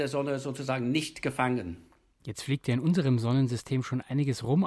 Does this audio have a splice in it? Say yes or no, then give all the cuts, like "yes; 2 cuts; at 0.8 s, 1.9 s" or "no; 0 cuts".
no; 0 cuts